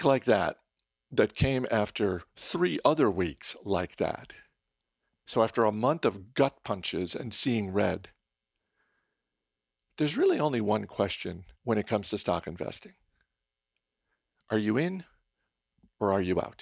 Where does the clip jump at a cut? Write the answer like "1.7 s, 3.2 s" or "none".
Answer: 11.5 s